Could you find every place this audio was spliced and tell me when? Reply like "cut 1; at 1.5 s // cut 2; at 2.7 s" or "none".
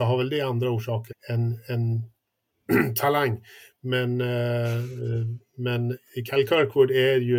cut 1; at 1.1 s